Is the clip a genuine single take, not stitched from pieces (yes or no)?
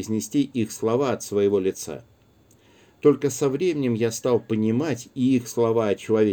yes